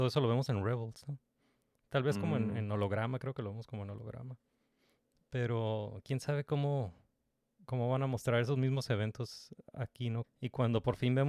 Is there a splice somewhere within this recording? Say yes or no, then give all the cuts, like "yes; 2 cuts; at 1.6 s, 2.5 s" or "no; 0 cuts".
yes; 1 cut; at 10.2 s